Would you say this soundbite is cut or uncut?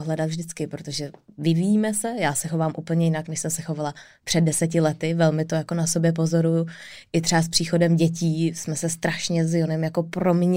uncut